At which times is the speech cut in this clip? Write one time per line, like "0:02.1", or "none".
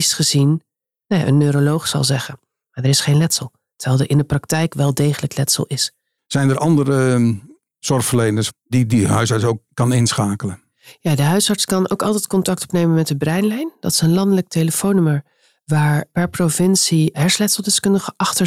0:06.2